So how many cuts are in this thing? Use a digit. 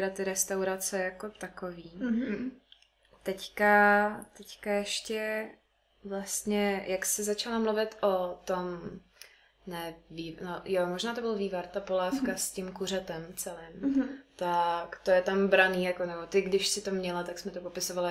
1